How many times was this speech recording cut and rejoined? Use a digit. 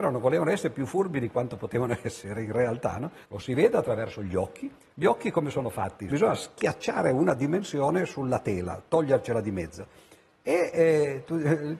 2